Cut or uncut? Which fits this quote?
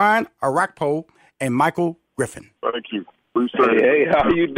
cut